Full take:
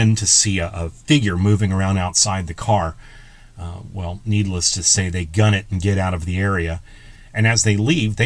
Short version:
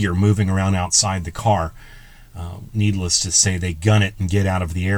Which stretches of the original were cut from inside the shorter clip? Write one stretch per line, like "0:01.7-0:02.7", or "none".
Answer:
0:03.9-0:04.2